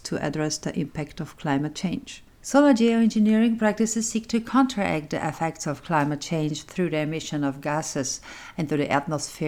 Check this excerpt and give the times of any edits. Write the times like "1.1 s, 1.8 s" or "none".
none

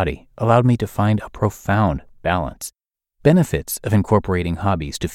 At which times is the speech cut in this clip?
3.2 s

